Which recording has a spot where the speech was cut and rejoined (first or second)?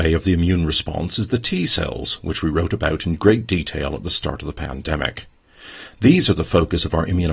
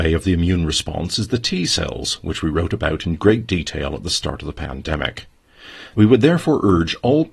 second